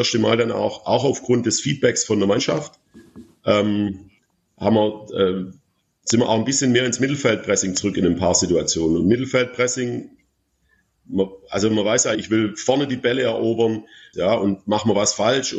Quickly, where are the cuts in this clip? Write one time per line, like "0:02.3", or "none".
0:12.1
0:14.1

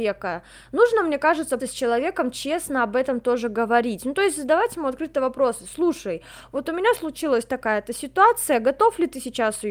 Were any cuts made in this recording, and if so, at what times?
0:01.6

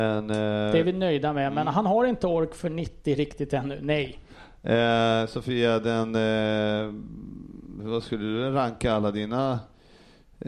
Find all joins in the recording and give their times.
none

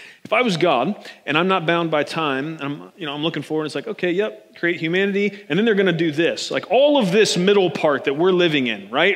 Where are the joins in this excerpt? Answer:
none

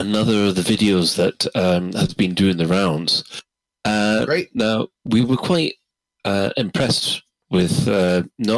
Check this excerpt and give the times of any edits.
none

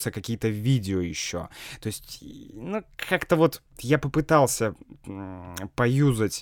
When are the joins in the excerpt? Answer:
none

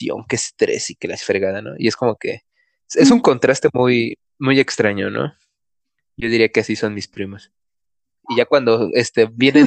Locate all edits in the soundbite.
0:08.2

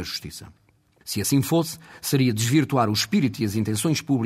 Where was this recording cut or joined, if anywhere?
none

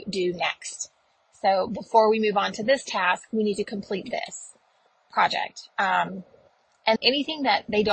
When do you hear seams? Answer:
0:07.0

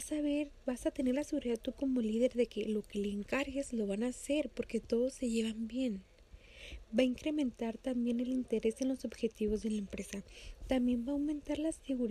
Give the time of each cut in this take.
0:10.6

